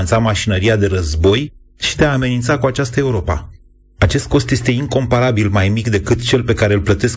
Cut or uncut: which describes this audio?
uncut